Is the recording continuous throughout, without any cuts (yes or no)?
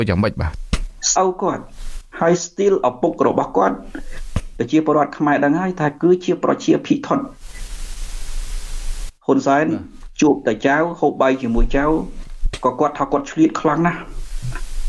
no